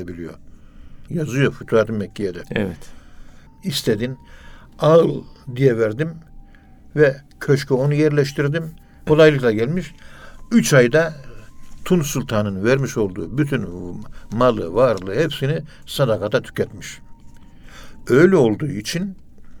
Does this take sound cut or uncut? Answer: cut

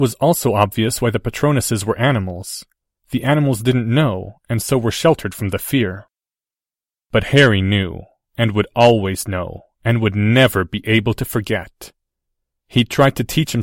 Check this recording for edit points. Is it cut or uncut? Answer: uncut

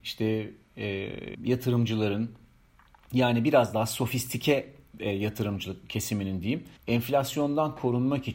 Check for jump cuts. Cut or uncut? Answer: cut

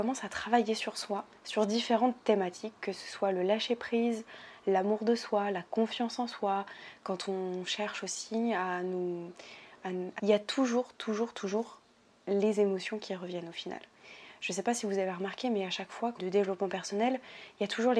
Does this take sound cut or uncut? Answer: cut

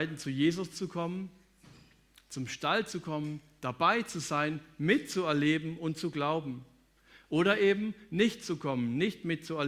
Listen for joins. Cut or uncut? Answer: uncut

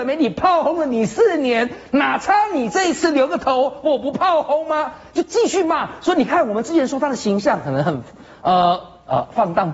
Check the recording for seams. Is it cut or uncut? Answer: uncut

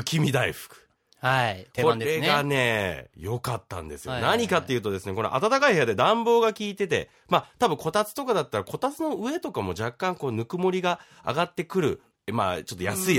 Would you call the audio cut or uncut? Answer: uncut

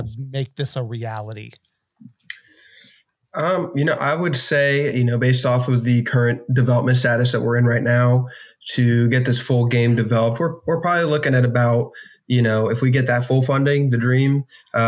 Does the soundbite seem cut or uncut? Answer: uncut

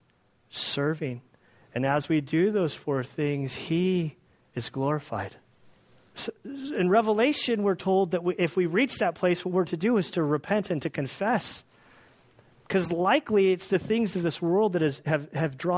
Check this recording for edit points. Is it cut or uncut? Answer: cut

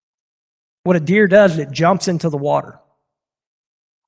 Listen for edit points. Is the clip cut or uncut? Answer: uncut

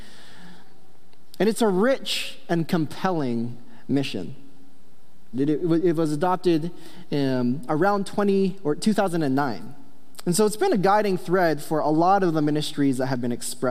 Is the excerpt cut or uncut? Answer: cut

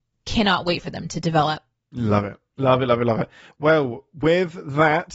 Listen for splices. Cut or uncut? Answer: uncut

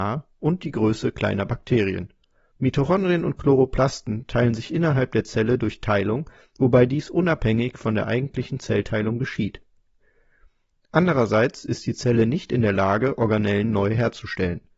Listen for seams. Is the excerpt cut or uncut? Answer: cut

